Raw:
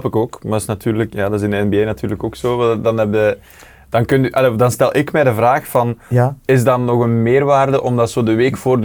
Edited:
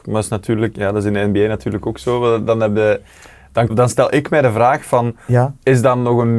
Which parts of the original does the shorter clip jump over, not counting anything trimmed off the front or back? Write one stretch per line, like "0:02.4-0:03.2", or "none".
0:04.1-0:04.5